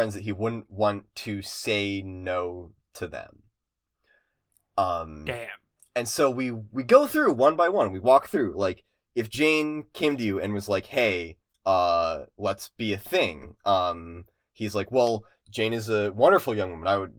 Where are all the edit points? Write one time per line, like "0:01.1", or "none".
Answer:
none